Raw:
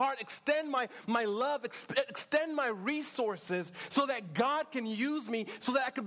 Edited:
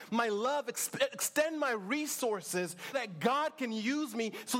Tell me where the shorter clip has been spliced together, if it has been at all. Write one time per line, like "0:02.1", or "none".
0:02.9